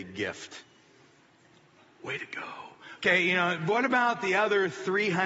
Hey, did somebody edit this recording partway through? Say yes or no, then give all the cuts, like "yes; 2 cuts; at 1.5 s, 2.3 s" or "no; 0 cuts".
no; 0 cuts